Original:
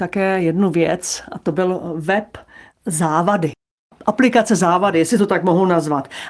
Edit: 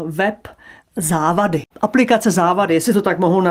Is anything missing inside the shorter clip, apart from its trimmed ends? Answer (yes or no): yes